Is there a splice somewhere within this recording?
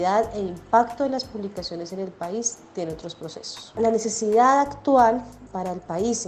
yes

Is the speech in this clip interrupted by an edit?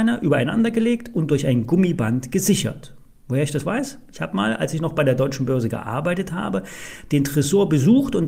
no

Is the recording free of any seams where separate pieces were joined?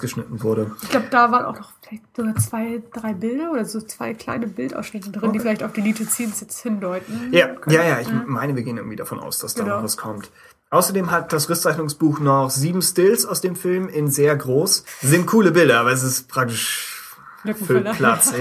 yes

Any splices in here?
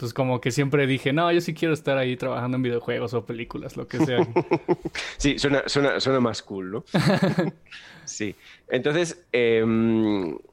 yes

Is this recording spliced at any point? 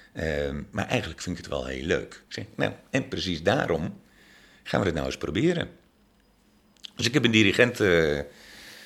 yes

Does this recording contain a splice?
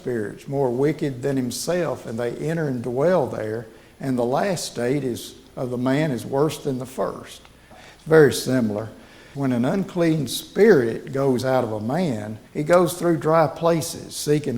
yes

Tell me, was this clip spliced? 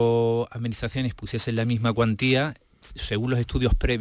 no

